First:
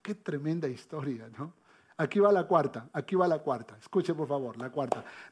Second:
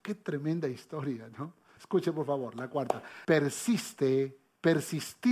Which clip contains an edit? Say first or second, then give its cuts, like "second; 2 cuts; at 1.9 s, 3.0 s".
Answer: second; 2 cuts; at 1.8 s, 3.2 s